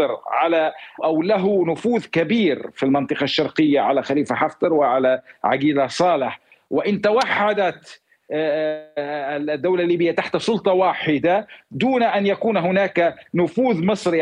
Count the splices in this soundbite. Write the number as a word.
one